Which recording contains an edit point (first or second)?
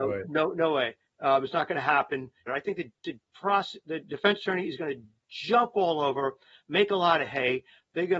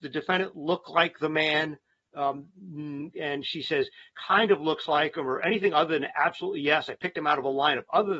first